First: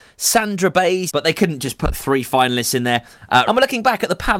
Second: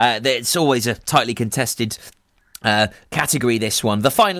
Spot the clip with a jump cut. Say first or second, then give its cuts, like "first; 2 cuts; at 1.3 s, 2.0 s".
first; 2 cuts; at 1.1 s, 3.5 s